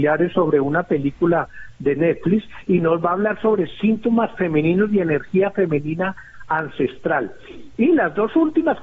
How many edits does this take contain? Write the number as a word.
zero